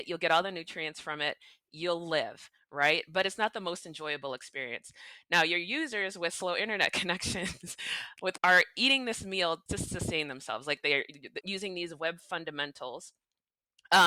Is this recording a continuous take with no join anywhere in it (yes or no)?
no